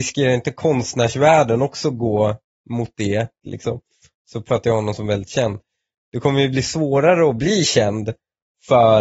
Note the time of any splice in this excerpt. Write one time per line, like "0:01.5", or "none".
0:03.4